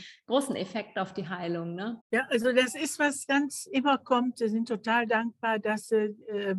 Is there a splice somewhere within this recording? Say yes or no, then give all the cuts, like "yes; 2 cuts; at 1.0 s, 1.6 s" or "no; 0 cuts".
yes; 2 cuts; at 2.0 s, 3.3 s